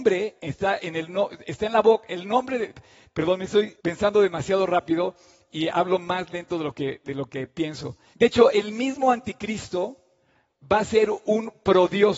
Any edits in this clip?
yes; 2 cuts; at 3.8 s, 8.1 s

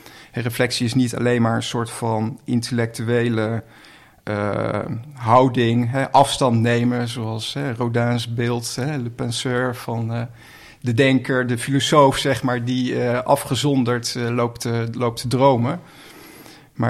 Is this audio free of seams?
yes; 0 cuts

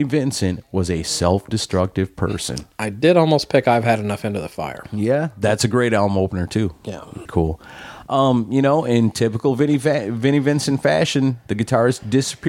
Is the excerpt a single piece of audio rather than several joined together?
no; 1 cut; at 7.3 s

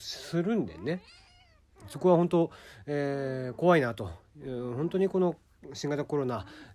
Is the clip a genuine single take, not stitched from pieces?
yes; 0 cuts

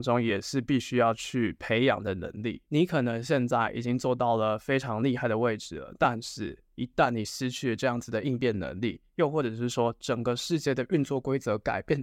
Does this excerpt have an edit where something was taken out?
yes; 1 cut; at 2.7 s

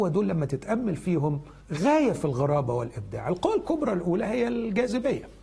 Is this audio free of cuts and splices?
no; 1 cut; at 1.6 s

